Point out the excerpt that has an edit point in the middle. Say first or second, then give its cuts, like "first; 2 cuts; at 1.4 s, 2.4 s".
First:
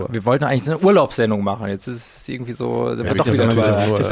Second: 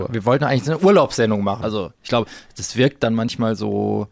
second; 1 cut; at 1.6 s